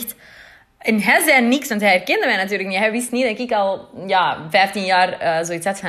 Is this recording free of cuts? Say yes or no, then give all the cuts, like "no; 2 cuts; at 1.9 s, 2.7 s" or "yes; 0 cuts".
yes; 0 cuts